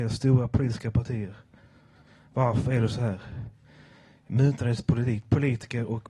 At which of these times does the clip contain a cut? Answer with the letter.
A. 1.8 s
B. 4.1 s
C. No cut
B